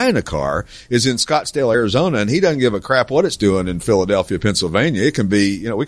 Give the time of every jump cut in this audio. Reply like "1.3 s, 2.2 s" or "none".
none